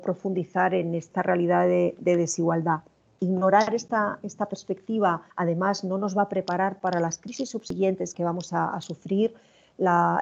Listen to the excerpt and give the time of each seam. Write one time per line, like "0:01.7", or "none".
0:05.3

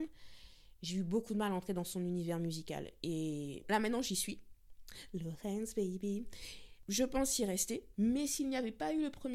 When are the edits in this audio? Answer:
0:03.6

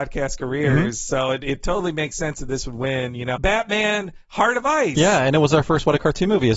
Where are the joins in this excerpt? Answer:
0:03.3

